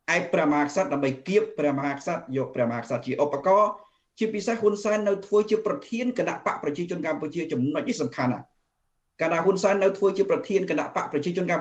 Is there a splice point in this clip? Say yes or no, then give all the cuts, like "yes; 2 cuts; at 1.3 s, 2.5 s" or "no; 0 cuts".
no; 0 cuts